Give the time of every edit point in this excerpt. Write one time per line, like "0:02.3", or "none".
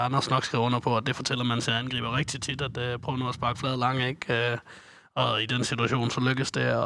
none